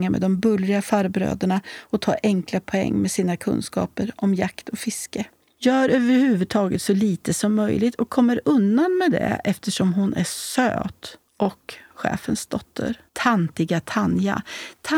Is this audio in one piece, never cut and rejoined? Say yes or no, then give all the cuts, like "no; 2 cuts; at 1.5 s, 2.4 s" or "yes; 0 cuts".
no; 3 cuts; at 5.6 s, 11.3 s, 13.1 s